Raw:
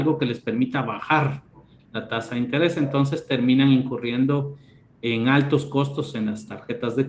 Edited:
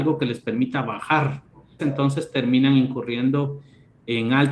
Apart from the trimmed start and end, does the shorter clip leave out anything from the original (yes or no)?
yes